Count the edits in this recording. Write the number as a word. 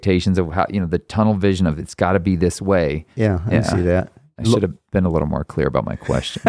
one